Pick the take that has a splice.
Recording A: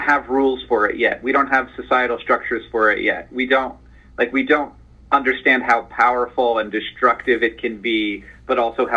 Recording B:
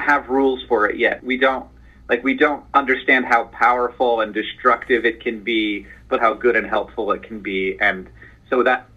B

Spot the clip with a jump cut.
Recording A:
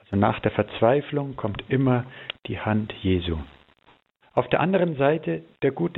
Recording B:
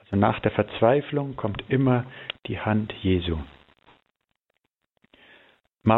A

